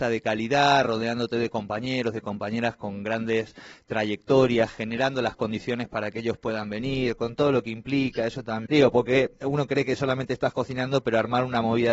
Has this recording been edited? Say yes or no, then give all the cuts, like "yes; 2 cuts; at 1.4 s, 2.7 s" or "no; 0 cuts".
yes; 1 cut; at 8.7 s